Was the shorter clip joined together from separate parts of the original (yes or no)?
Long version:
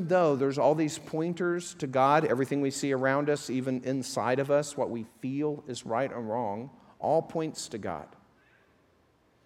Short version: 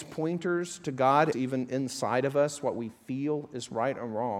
yes